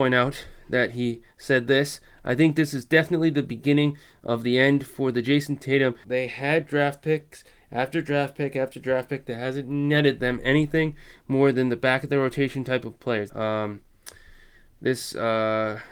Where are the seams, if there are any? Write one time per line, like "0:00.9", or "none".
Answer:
0:06.0
0:13.3